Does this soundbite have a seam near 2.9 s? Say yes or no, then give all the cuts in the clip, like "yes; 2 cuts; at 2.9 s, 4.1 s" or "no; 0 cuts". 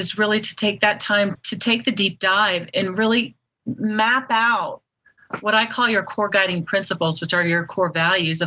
no; 0 cuts